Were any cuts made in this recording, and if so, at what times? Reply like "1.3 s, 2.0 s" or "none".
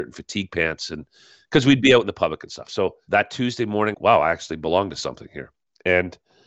3.9 s